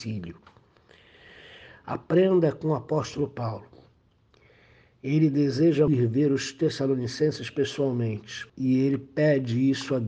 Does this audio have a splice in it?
yes; 2 cuts; at 5.9 s, 8.5 s

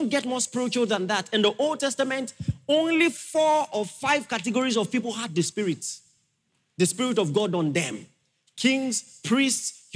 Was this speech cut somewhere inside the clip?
no; 0 cuts

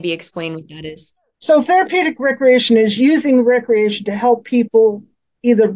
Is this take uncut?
yes; 0 cuts

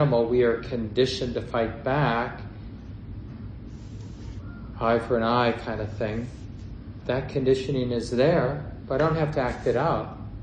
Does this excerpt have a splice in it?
yes; 1 cut; at 7.0 s

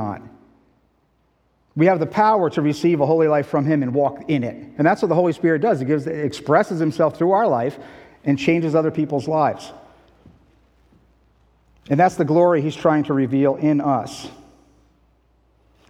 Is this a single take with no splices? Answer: no; 1 cut; at 4.8 s

